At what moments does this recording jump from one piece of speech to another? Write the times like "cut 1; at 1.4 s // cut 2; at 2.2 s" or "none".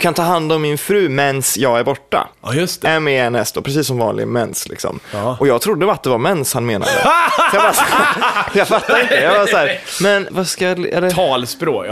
cut 1; at 2.3 s // cut 2; at 10.3 s